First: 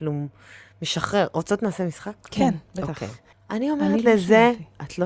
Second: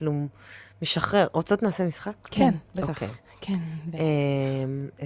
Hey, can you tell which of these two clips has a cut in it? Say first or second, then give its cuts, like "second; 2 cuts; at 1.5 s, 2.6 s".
first; 1 cut; at 3.3 s